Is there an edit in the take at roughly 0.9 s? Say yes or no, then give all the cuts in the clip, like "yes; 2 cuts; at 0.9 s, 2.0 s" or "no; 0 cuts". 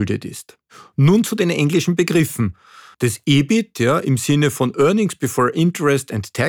no; 1 cut; at 2.9 s